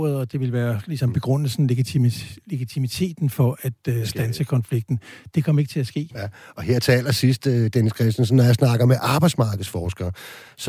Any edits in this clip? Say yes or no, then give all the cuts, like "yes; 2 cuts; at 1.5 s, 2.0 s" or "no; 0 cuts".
yes; 1 cut; at 6.1 s